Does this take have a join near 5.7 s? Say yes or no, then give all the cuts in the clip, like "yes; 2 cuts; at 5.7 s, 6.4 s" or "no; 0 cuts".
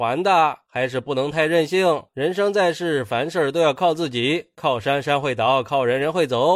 no; 1 cut; at 2.1 s